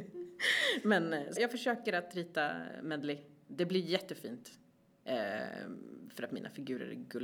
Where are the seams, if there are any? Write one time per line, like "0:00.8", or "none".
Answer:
0:01.4